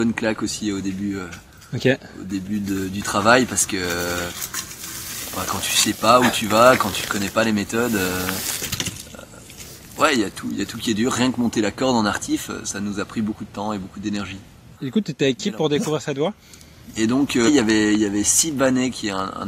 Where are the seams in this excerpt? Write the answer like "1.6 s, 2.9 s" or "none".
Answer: 14.7 s, 17.5 s